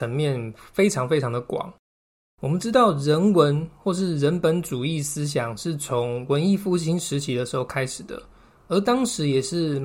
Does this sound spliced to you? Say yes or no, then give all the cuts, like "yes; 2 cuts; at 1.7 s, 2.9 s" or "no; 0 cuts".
no; 0 cuts